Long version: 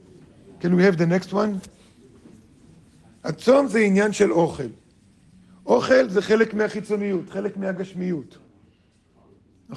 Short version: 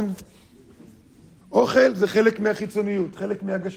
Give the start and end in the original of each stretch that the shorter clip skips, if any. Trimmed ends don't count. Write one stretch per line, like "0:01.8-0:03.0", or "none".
0:02.9-0:05.6